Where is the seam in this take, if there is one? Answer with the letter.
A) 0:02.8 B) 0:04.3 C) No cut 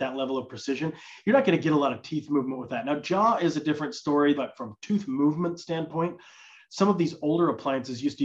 B